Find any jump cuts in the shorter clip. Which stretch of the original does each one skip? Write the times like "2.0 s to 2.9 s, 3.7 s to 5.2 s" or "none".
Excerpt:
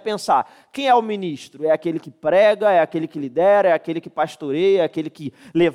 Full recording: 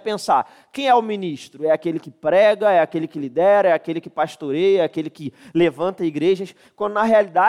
none